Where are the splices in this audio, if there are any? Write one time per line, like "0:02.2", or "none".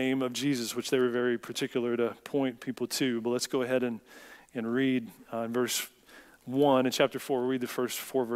none

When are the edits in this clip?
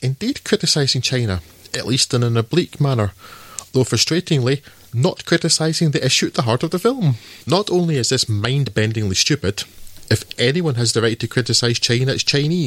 0:07.4

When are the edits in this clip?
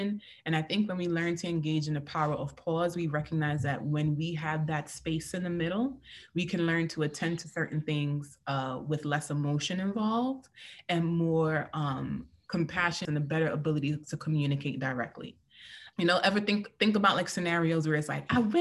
0:13.1
0:15.9

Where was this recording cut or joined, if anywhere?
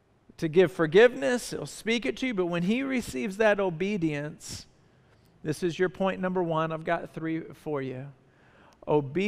none

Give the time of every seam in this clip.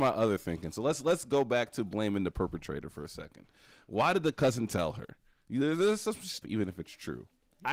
0:06.4

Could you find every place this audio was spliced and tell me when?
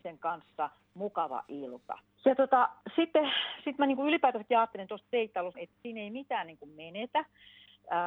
0:02.1
0:05.5

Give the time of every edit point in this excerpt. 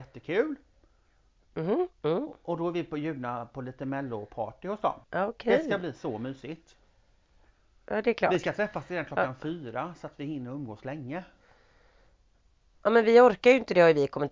0:05.0

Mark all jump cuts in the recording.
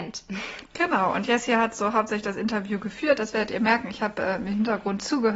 none

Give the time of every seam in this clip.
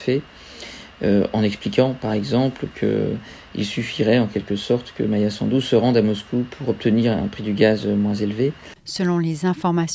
0:08.8

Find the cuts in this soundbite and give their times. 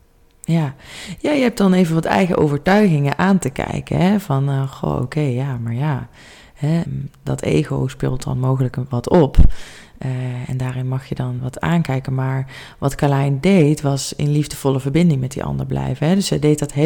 0:06.9
0:11.4

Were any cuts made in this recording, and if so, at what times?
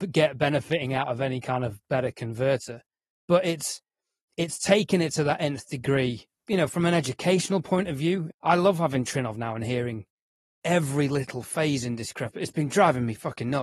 0:08.3

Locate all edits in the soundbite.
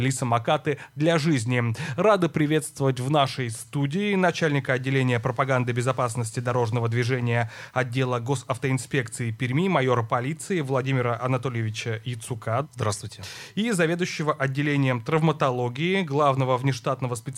0:12.6

